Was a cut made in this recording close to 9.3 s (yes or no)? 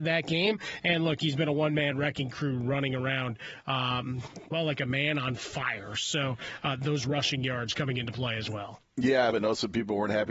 yes